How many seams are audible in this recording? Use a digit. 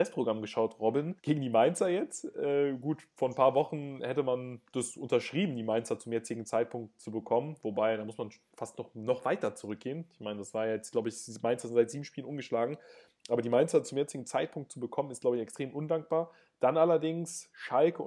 1